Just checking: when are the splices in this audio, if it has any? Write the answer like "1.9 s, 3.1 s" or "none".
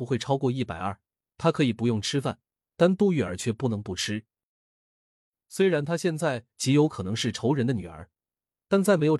1.3 s